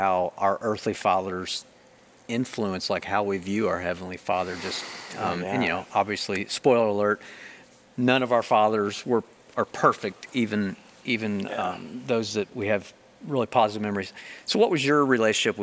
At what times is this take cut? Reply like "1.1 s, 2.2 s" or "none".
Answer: none